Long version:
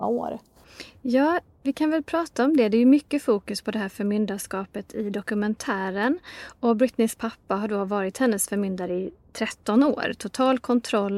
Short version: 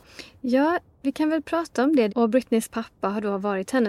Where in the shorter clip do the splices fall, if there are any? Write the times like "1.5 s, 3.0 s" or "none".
2.1 s